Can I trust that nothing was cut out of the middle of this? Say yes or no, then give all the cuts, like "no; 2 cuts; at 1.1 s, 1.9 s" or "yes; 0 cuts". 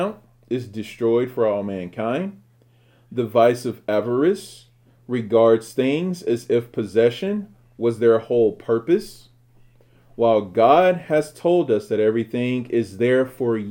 yes; 0 cuts